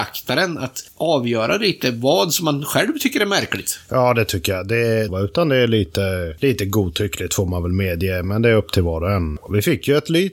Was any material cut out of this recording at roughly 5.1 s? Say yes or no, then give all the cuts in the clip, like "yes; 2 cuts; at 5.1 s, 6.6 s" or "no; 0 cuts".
yes; 1 cut; at 5.1 s